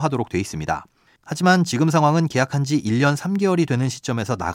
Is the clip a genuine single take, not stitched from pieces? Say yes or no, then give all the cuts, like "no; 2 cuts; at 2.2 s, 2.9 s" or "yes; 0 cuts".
no; 1 cut; at 1.1 s